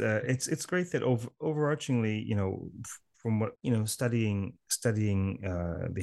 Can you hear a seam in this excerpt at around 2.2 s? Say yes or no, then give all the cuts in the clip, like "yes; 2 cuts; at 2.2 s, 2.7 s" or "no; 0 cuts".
no; 1 cut; at 3.6 s